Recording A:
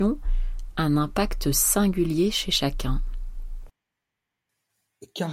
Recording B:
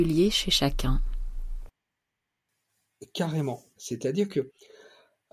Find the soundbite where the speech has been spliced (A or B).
B